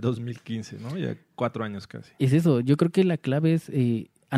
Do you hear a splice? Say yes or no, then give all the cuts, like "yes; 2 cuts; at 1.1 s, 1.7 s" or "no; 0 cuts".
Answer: no; 0 cuts